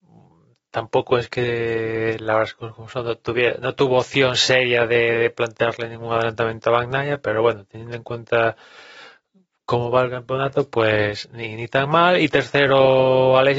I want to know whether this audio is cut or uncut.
uncut